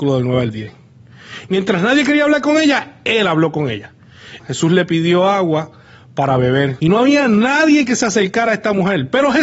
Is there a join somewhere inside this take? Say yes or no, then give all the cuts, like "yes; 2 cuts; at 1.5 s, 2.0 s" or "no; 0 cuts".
yes; 3 cuts; at 1.5 s, 4.4 s, 6.8 s